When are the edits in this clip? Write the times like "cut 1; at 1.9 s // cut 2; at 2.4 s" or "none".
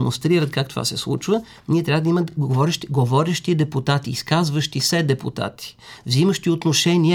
none